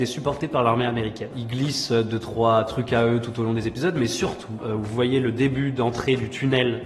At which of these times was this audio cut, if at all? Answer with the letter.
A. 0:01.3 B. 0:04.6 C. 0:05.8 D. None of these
B